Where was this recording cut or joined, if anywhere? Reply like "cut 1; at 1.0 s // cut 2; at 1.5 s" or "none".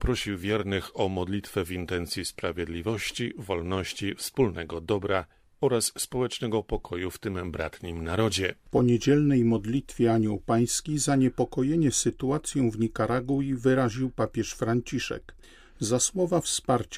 cut 1; at 8.7 s